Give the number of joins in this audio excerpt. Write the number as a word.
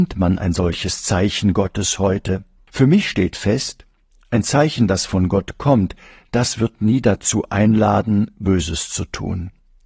one